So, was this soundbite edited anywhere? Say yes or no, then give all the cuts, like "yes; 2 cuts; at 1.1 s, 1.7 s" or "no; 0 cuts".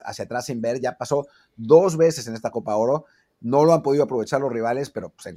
no; 0 cuts